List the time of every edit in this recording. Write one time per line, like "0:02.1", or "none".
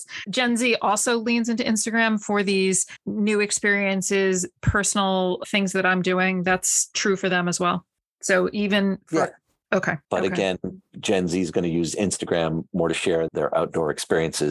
0:10.1
0:13.3